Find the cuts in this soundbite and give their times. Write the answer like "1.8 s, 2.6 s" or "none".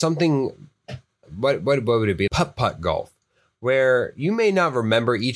2.3 s

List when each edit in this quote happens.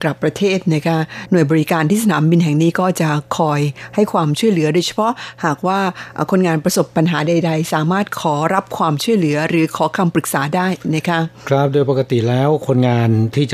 none

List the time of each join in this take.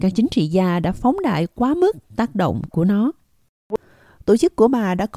none

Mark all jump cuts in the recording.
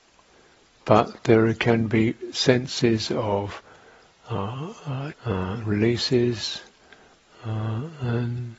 5.1 s

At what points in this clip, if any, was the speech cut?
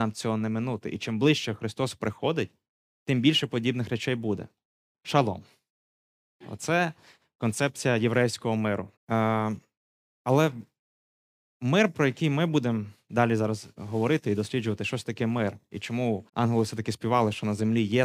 4.9 s, 9.0 s, 16.3 s

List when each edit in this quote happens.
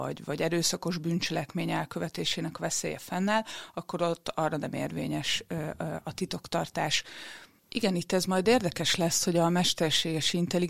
7.6 s

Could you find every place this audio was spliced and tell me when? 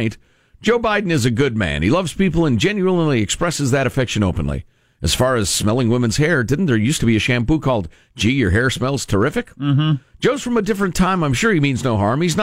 none

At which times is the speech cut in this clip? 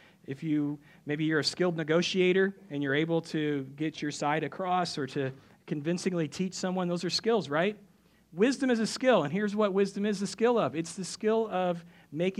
none

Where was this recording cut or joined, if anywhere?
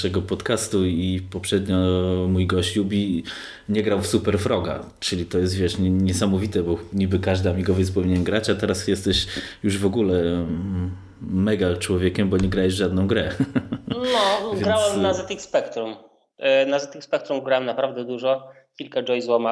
none

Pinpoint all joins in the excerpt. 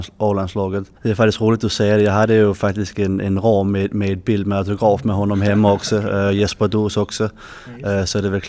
1.0 s

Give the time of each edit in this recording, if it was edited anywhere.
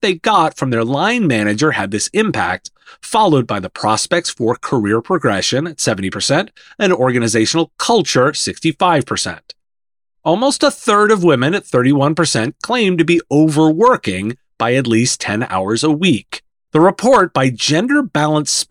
16.7 s

